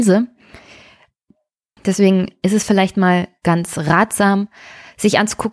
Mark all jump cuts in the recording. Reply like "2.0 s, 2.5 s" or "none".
1.8 s